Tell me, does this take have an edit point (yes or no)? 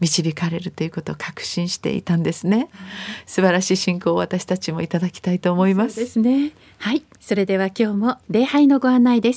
yes